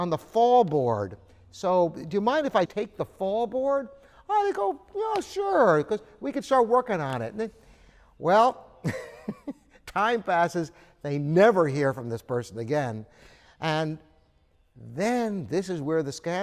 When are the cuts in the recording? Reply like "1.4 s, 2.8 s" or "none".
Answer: 2.7 s